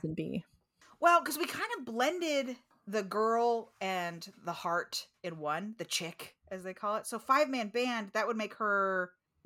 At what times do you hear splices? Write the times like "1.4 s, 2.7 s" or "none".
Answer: none